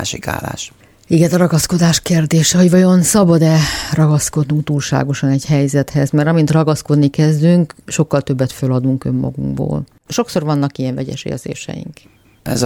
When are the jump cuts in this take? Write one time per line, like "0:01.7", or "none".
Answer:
0:10.1